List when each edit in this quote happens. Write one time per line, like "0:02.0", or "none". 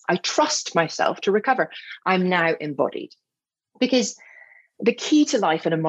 none